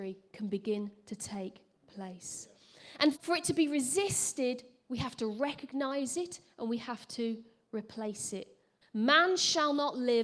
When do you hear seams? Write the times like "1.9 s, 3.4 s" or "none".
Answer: 3.2 s, 8.8 s